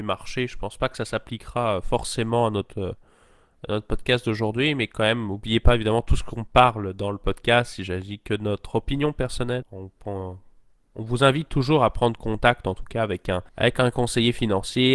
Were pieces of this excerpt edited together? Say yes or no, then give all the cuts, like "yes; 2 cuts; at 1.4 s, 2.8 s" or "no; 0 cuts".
yes; 2 cuts; at 9.6 s, 13.5 s